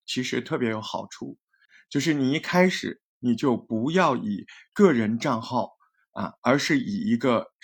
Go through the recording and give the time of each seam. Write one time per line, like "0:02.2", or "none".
none